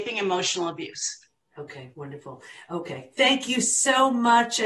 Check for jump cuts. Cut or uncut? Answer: uncut